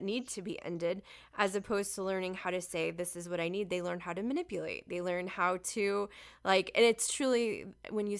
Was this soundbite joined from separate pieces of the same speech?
no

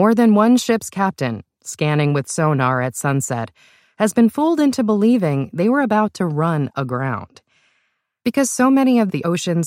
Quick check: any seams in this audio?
no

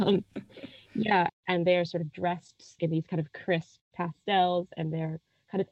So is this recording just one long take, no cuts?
no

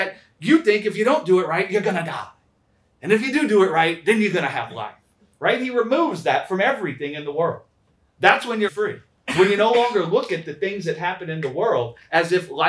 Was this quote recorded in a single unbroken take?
no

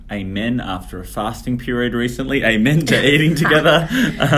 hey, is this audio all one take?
yes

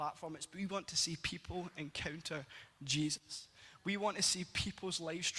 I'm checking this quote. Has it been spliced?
no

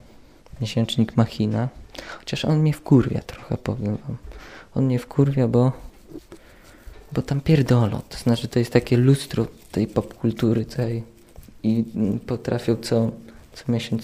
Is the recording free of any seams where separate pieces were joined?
yes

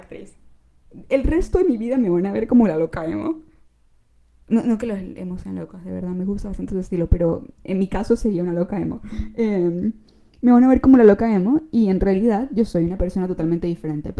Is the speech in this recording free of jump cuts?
yes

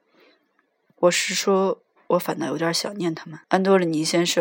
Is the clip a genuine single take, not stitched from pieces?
no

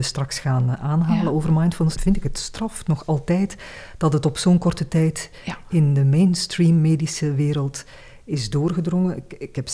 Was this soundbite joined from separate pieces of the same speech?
yes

